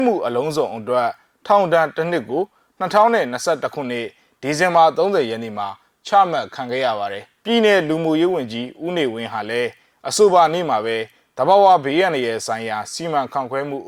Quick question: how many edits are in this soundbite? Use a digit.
1